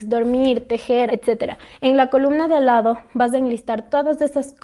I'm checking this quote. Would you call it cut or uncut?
cut